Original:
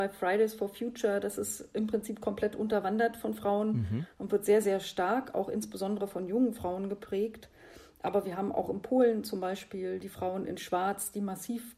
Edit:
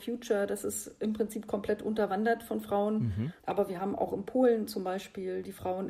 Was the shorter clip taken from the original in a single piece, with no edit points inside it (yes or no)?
no